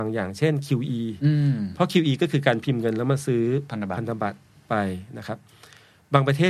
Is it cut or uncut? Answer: uncut